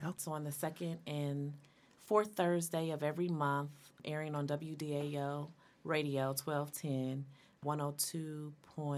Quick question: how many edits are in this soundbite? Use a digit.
0